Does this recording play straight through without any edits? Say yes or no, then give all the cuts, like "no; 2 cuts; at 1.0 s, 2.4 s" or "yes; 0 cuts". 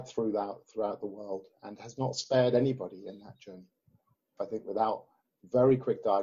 no; 1 cut; at 4.4 s